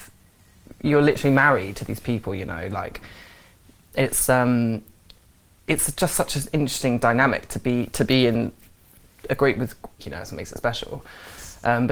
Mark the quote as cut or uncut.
cut